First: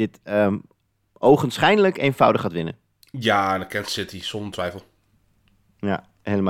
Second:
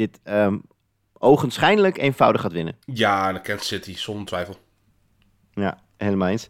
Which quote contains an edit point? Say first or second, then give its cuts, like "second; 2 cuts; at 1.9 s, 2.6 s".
second; 1 cut; at 2.8 s